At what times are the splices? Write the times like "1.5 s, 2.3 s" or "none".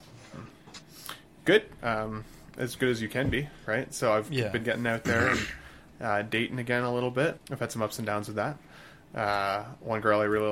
7.4 s